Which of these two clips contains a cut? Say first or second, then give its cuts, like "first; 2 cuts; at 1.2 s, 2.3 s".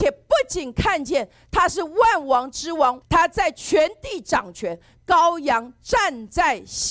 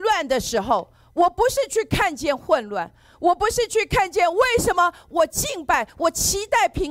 first; 2 cuts; at 3.0 s, 5.0 s